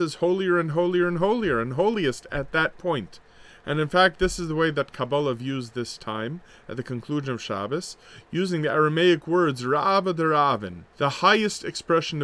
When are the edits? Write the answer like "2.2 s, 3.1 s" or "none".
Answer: 10.9 s